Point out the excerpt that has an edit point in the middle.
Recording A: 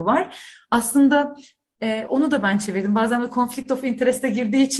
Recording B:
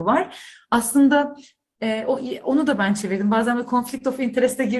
A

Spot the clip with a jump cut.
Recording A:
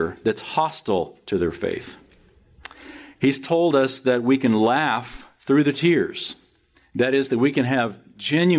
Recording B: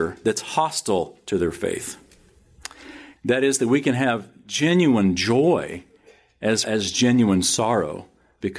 B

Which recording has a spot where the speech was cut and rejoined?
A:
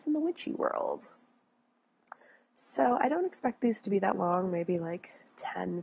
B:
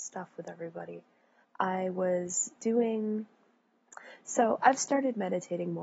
B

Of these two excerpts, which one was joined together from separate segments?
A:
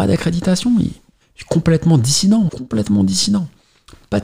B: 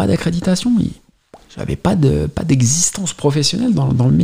A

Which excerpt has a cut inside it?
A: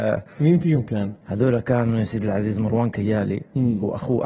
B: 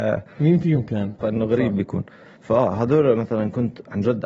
B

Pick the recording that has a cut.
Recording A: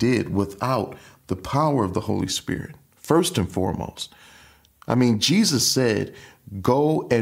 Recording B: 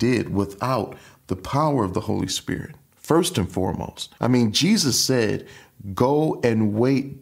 B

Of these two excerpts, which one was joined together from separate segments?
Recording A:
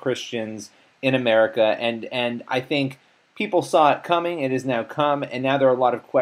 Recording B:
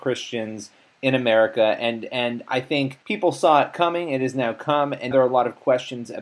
B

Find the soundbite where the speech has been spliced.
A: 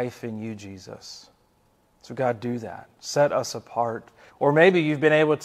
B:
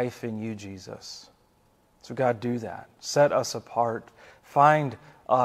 A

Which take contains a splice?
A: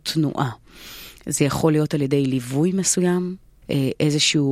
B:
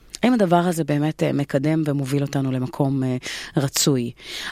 A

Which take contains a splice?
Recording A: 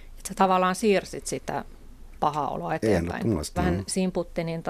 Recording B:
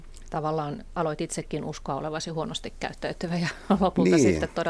A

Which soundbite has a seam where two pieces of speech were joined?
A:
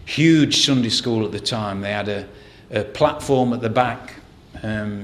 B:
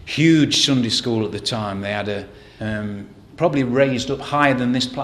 B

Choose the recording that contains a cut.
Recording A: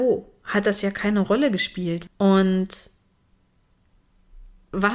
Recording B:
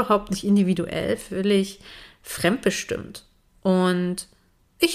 A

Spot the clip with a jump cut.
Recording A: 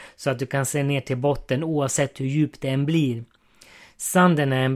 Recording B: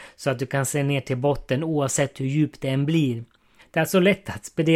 B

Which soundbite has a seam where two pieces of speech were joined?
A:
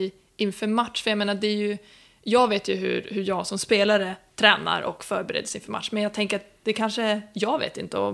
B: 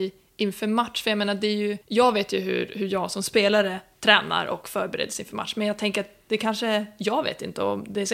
B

